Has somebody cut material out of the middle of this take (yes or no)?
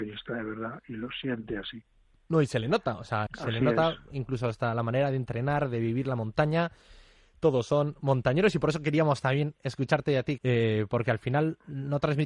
yes